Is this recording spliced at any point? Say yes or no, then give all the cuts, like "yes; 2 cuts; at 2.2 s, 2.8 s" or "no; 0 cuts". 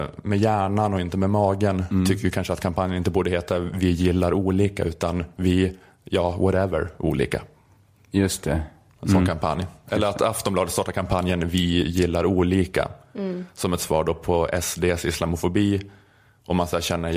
yes; 1 cut; at 9.0 s